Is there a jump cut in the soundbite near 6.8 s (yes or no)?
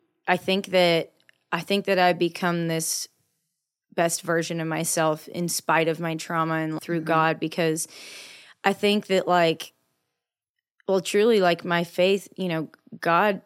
yes